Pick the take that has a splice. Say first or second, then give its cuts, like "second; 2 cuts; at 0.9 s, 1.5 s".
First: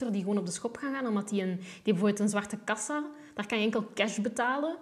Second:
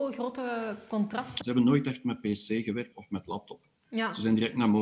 second; 2 cuts; at 1.4 s, 2.9 s